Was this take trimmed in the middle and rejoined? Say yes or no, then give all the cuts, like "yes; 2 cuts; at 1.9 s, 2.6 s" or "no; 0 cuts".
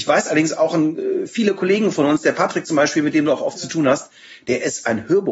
no; 0 cuts